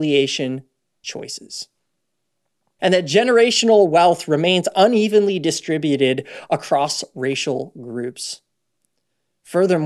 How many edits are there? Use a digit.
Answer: 1